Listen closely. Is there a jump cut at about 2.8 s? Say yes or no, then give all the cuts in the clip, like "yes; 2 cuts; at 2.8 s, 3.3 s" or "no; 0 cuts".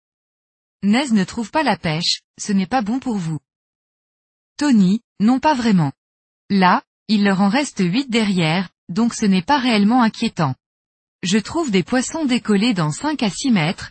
no; 2 cuts; at 7.0 s, 11.1 s